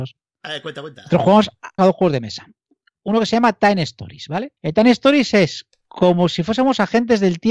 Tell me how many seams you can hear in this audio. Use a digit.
2